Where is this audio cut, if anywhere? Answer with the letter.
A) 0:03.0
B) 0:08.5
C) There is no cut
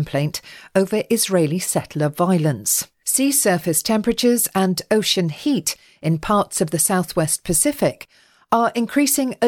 A